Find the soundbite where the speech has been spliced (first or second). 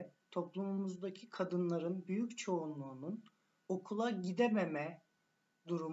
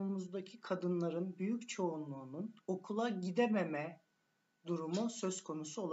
second